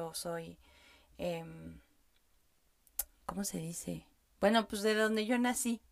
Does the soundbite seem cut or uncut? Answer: uncut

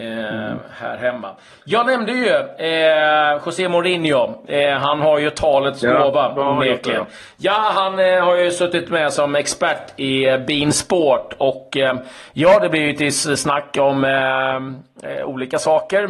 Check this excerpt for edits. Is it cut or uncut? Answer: uncut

